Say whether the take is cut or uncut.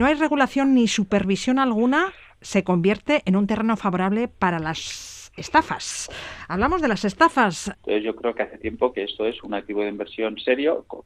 cut